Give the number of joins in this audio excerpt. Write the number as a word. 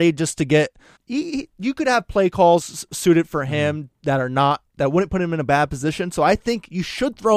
two